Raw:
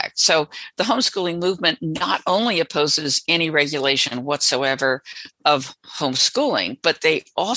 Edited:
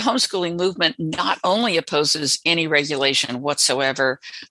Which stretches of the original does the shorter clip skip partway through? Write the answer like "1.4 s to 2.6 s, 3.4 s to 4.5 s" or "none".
none

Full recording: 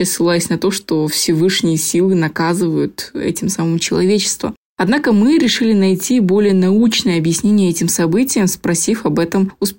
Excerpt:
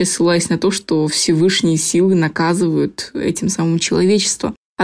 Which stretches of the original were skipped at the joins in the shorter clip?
none

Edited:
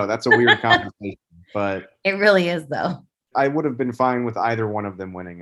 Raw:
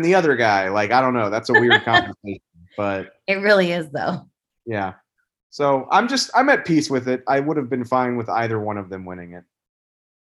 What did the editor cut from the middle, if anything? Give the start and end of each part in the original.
4.5 s to 7.2 s

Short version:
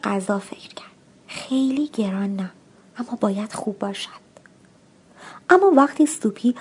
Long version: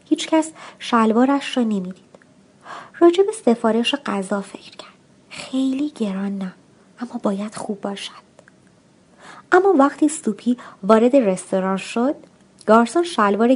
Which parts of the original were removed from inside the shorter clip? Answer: none

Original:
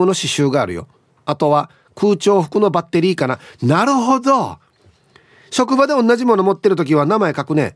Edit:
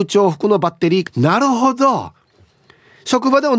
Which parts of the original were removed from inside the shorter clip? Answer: 3.2 s to 3.5 s

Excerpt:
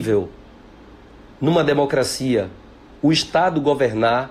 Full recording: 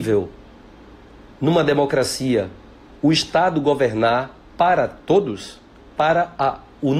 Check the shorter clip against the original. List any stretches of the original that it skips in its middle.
none

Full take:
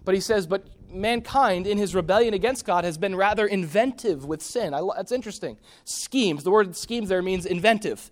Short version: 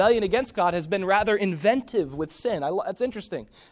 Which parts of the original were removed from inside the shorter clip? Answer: none

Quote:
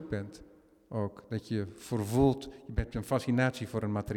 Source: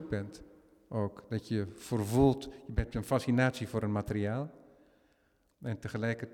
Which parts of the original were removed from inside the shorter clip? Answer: none

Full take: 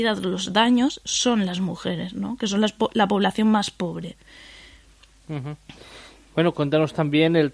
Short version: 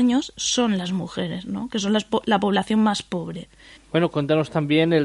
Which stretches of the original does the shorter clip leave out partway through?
4.4 s to 6.2 s

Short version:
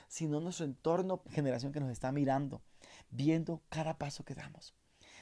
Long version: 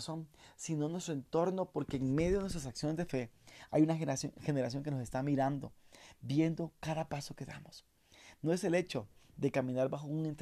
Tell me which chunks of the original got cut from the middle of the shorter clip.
1.7 s to 4.3 s

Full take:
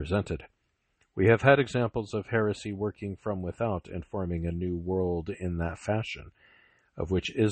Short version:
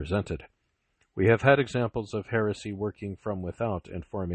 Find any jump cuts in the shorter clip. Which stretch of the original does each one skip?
none

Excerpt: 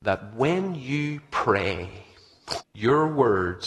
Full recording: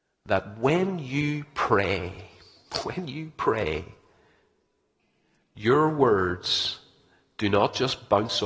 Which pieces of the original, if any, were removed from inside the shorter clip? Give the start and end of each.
2.8 s to 5.4 s

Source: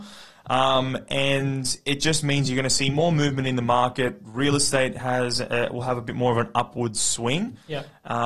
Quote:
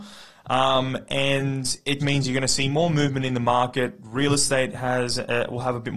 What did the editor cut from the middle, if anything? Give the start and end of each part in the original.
2.0 s to 2.2 s

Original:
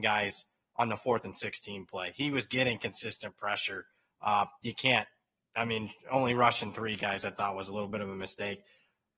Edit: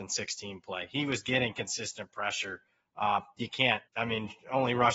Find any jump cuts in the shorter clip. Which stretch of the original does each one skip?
5.1 s to 5.5 s

